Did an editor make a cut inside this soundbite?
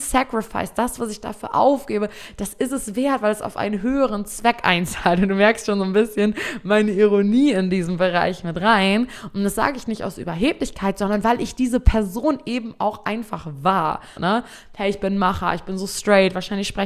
yes; 1 cut; at 14.2 s

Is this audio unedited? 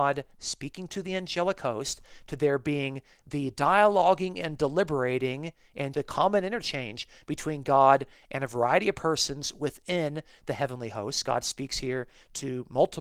no; 1 cut; at 5.9 s

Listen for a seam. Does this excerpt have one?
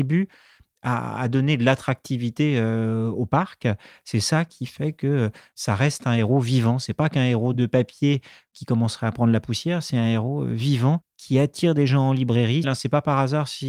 yes; 1 cut; at 12.6 s

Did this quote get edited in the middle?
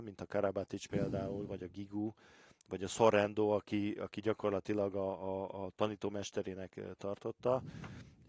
no; 0 cuts

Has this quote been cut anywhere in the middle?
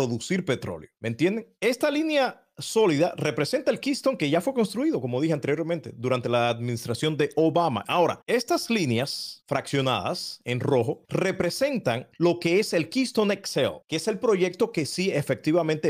yes; 2 cuts; at 1.6 s, 7.8 s

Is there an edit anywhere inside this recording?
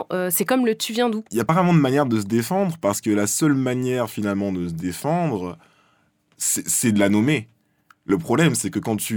no; 0 cuts

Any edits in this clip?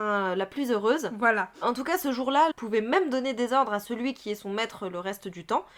yes; 1 cut; at 2.5 s

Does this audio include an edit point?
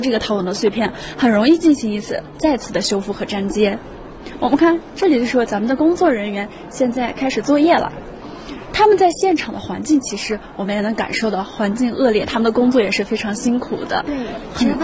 no; 0 cuts

